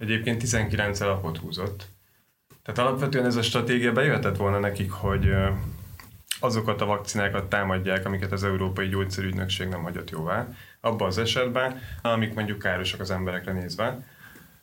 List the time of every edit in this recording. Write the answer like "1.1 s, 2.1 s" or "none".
12.0 s